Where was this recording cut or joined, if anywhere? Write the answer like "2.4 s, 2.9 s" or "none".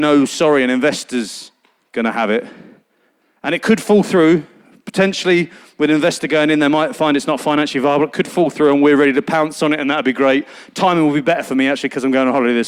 none